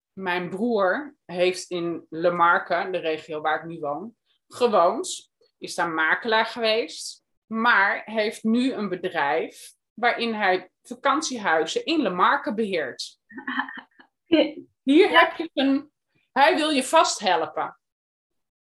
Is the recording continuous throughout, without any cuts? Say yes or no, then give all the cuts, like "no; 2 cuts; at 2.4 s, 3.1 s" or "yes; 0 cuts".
yes; 0 cuts